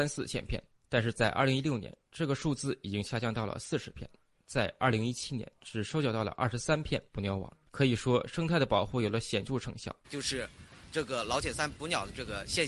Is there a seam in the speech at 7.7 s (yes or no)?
no